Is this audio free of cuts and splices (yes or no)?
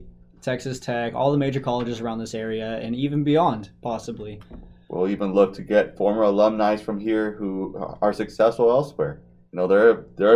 yes